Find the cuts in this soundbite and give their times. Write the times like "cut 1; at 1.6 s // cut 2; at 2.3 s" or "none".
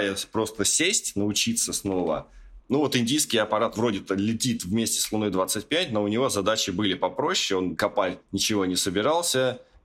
cut 1; at 2.6 s

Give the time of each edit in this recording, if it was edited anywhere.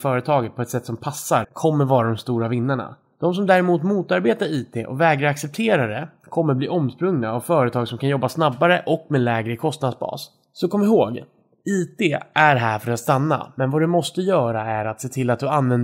cut 1; at 1.4 s

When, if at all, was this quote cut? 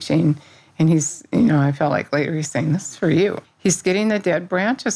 cut 1; at 3.4 s

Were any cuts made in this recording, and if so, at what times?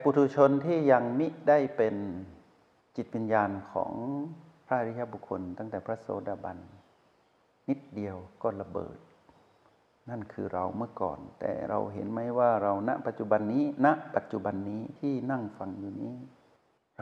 none

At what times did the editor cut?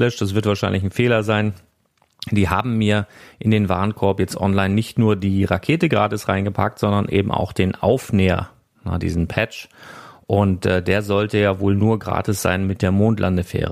cut 1; at 9.0 s

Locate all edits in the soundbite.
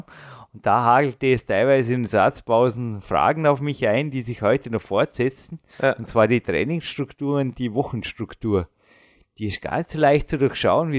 none

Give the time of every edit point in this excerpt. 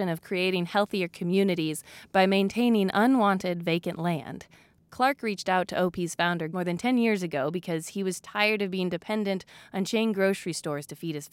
cut 1; at 6.5 s

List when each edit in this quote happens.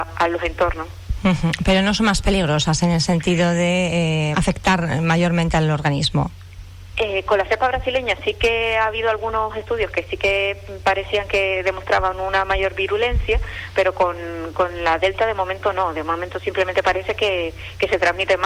cut 1; at 4.3 s

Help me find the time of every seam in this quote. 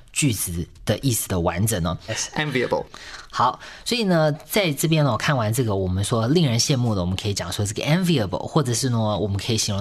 cut 1; at 2.1 s

